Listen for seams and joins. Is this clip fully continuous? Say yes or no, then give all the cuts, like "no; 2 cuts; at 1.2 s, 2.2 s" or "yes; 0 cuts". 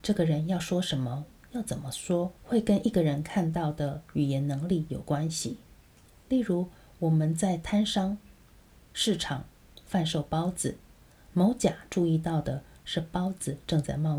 no; 1 cut; at 2.4 s